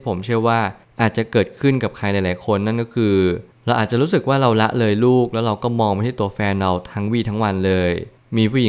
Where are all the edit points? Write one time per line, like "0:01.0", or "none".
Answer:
none